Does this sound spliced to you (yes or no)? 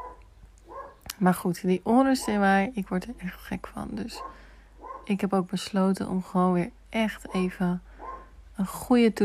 no